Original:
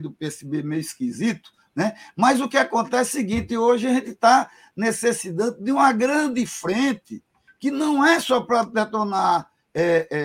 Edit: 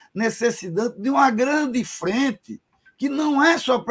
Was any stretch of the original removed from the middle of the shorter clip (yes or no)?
no